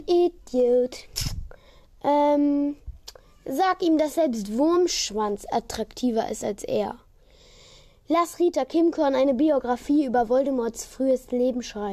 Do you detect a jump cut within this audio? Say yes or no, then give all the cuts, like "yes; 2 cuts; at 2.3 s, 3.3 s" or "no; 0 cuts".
no; 0 cuts